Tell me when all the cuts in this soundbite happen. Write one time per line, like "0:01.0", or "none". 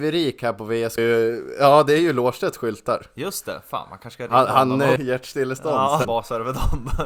0:01.0
0:05.0
0:06.0